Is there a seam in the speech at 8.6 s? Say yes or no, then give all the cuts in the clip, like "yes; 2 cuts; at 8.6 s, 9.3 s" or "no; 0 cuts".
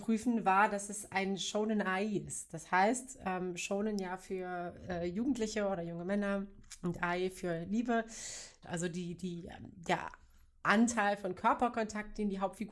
yes; 1 cut; at 8.6 s